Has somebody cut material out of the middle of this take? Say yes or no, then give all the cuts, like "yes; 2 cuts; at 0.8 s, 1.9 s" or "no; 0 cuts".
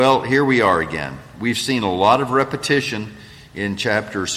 no; 0 cuts